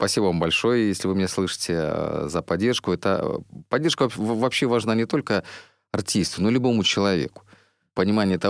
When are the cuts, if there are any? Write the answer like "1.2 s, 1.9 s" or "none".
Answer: none

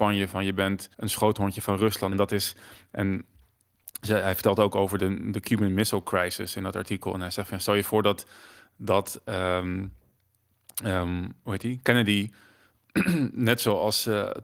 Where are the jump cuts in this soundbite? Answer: 0.9 s, 2.1 s, 5.0 s

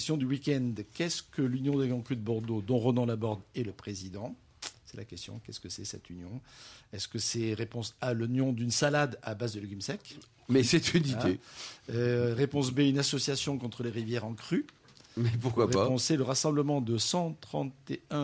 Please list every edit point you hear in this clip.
none

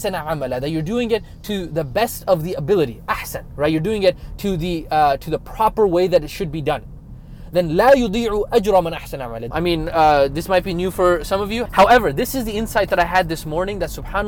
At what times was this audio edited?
9.5 s, 11.7 s

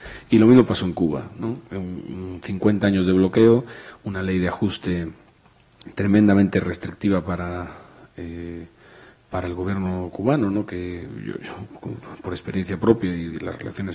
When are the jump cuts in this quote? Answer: none

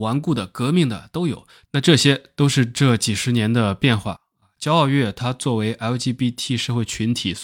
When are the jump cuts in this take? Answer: 1.6 s

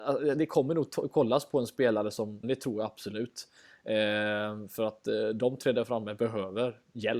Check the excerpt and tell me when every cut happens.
2.4 s

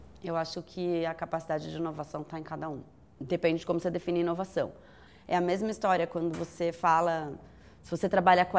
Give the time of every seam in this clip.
3.2 s, 5.1 s

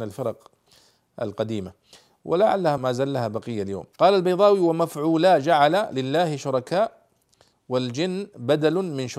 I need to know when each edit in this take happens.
2.8 s, 3.9 s

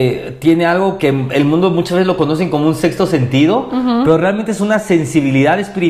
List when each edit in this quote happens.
1.0 s

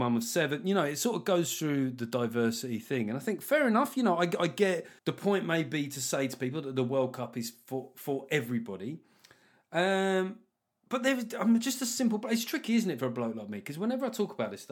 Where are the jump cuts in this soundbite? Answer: 5.0 s

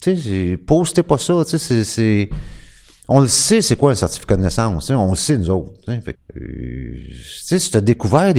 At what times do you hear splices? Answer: 6.1 s

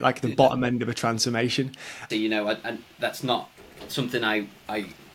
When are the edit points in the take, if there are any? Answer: 2.1 s

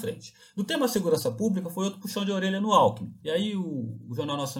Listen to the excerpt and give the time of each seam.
3.2 s

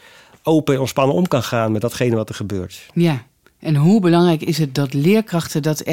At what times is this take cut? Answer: none

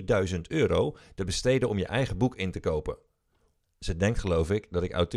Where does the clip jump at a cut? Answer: 3.6 s

